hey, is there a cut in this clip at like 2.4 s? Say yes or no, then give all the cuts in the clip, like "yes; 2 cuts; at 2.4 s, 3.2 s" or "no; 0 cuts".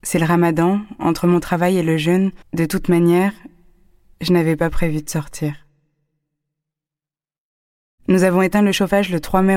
yes; 1 cut; at 2.4 s